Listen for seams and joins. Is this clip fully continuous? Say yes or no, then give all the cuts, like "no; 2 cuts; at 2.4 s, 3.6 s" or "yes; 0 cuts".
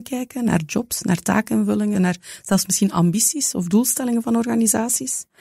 no; 1 cut; at 1.9 s